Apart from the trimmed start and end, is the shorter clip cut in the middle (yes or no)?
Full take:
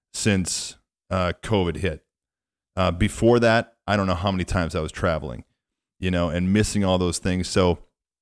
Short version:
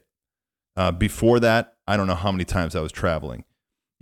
no